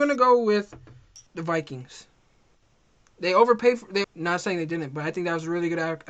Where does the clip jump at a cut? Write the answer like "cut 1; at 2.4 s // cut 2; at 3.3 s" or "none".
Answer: cut 1; at 1.3 s // cut 2; at 4.0 s